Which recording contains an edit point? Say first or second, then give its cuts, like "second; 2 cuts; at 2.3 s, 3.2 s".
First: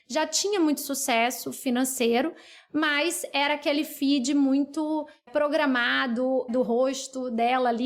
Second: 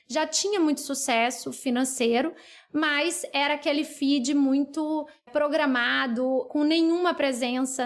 first; 1 cut; at 6.5 s